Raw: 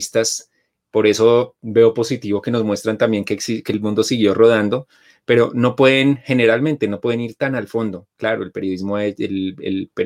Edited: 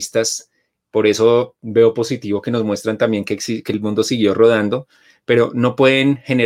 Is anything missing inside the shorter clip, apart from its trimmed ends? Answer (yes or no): no